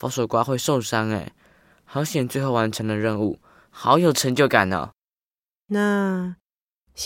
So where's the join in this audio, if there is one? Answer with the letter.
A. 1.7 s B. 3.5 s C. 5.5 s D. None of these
D